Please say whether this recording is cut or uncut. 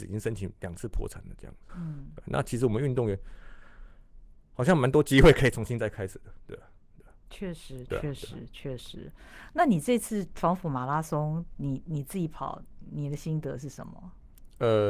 cut